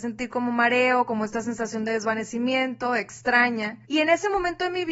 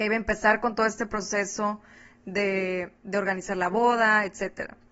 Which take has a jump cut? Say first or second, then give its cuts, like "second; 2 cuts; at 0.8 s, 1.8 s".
first; 1 cut; at 3.8 s